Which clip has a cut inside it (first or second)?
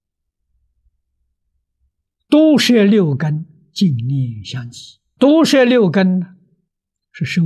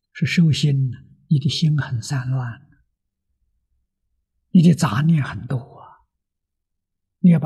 first